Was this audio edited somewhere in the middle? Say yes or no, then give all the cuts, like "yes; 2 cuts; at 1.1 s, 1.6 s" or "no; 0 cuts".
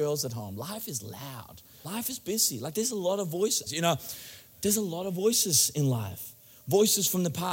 yes; 2 cuts; at 1.8 s, 3.7 s